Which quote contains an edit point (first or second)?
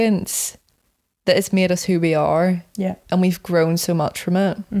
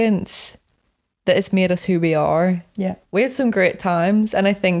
second